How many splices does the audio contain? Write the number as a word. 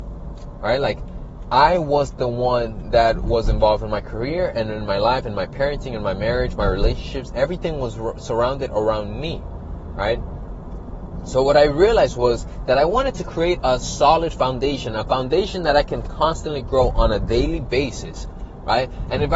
one